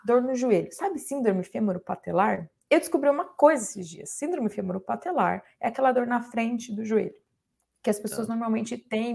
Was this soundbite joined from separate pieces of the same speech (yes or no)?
no